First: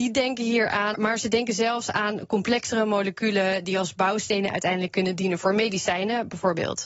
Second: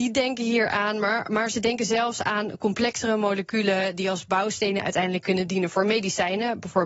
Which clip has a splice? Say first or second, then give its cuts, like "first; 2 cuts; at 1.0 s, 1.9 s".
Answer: first; 1 cut; at 0.9 s